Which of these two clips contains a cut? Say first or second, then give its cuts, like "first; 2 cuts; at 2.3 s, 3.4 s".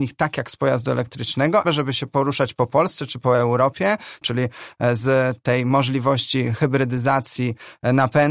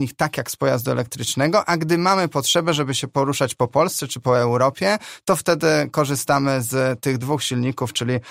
first; 2 cuts; at 1.6 s, 4.2 s